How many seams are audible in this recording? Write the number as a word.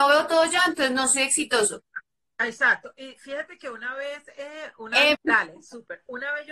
one